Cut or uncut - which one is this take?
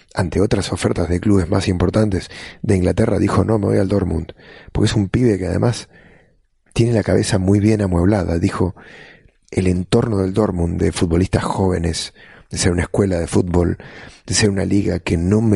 uncut